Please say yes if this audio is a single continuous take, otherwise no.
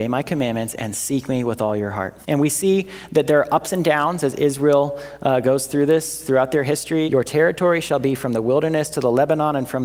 no